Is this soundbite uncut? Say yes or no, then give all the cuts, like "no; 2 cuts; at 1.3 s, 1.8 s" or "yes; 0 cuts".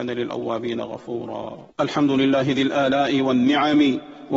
no; 1 cut; at 1.7 s